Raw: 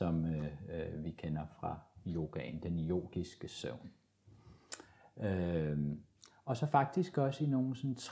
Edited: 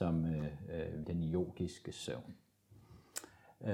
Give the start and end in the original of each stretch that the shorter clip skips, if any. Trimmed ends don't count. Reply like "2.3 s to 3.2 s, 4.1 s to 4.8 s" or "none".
1.0 s to 2.6 s